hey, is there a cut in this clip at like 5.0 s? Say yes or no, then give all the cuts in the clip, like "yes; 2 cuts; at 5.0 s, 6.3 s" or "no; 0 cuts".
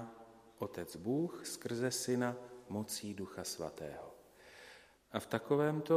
yes; 1 cut; at 5.0 s